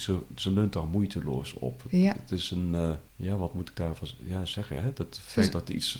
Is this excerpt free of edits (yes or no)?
no